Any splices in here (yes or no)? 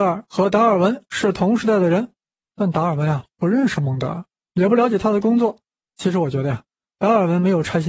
yes